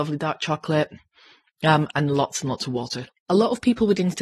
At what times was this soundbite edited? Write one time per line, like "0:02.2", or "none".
0:01.9
0:03.1